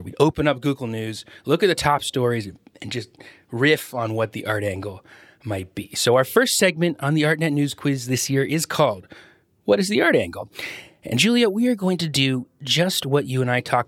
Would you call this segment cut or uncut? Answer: uncut